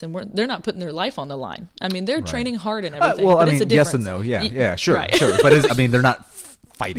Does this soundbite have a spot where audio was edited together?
yes; 1 cut; at 5.7 s

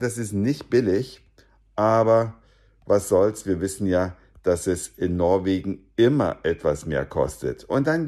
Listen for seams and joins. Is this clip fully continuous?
yes; 0 cuts

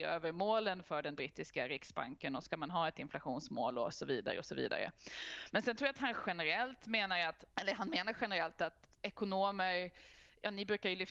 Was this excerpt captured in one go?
no; 1 cut; at 7.5 s

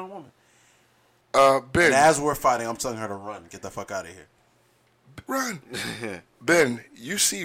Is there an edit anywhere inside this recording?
yes; 2 cuts; at 1.2 s, 5.3 s

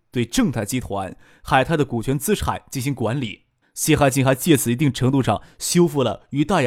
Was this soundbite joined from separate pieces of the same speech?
yes; 1 cut; at 3.6 s

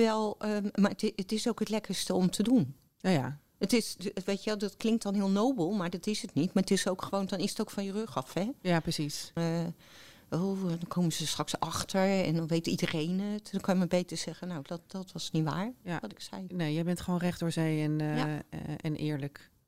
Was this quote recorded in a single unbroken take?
no; 1 cut; at 9.4 s

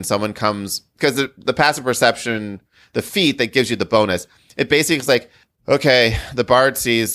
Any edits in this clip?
no; 0 cuts

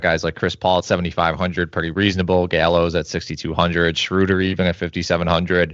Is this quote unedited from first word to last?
yes; 0 cuts

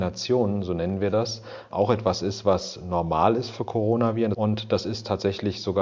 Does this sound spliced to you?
yes; 1 cut; at 4.3 s

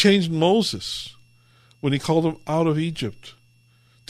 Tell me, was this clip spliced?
no; 0 cuts

